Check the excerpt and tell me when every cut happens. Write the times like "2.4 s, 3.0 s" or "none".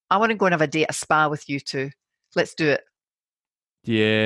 none